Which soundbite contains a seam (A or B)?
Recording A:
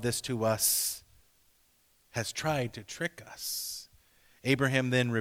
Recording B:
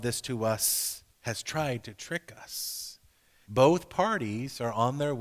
B